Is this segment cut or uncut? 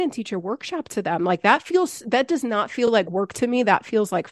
uncut